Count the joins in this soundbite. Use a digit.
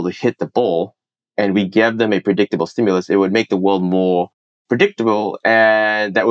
0